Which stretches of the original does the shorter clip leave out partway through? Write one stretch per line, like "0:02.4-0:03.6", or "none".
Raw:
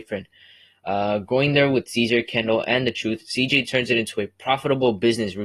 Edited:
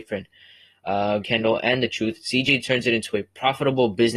0:01.2-0:02.2